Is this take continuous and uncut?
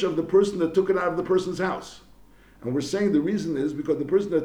yes; 0 cuts

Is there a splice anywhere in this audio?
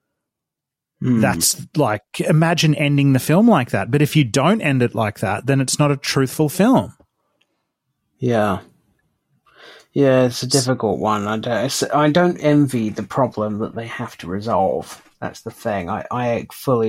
no; 0 cuts

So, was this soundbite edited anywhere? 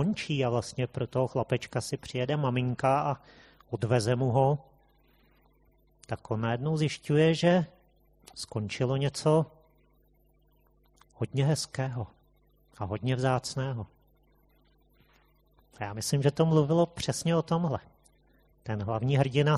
no; 0 cuts

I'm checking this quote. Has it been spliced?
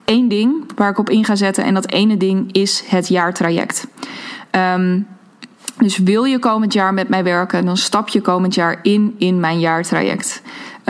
no; 0 cuts

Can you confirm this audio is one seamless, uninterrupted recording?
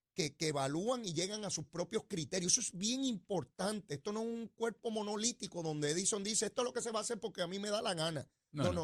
yes; 0 cuts

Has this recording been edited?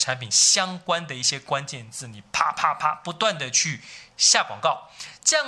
no; 0 cuts

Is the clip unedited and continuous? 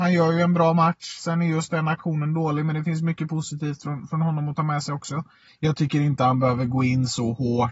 no; 1 cut; at 5.5 s

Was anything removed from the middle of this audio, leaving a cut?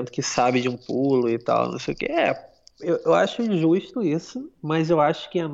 no; 0 cuts

